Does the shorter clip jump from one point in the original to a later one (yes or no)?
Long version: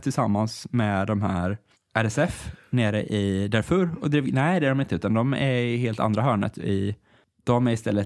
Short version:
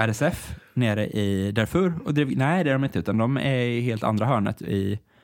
no